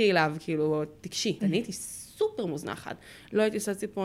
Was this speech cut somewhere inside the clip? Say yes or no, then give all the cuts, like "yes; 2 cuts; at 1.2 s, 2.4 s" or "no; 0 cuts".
yes; 1 cut; at 1.4 s